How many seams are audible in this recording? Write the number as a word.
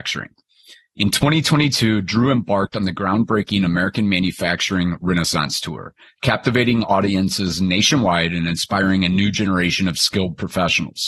zero